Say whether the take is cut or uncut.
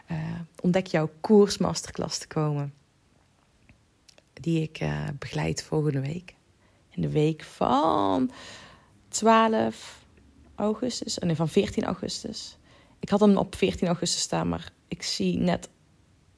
uncut